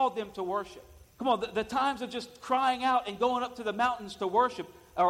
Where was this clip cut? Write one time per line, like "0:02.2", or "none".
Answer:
0:01.1